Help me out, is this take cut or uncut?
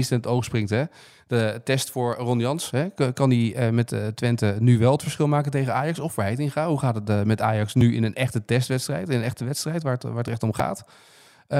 uncut